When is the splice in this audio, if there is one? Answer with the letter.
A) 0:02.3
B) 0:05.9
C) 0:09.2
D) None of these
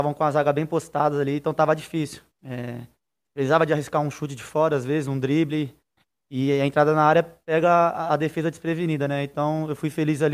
A